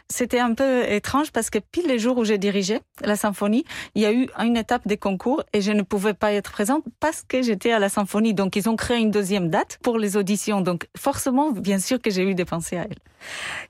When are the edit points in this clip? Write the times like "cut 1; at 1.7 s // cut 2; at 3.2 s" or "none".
none